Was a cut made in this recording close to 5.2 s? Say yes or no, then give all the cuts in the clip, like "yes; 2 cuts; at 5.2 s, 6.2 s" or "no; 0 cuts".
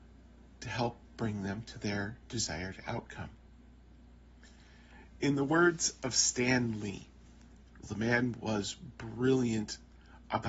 no; 1 cut; at 7.8 s